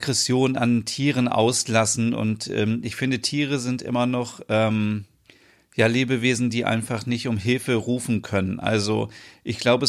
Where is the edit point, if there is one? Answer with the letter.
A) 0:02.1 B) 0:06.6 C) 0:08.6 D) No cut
D